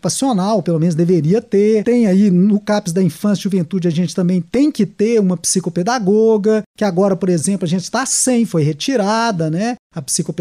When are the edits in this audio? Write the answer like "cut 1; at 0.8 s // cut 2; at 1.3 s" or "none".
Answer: none